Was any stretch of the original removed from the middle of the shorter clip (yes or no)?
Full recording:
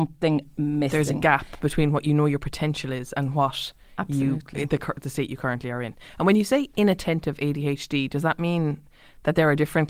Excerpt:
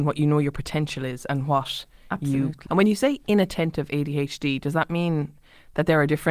yes